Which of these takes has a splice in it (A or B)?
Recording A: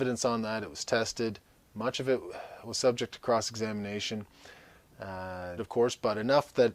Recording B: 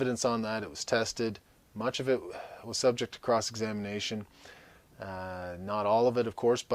A